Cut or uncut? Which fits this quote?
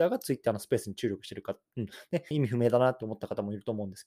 cut